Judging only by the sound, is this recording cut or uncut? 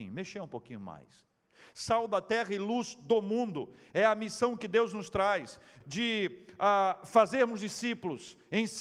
cut